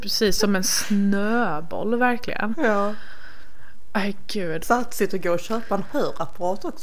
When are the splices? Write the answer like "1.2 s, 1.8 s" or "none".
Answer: 4.6 s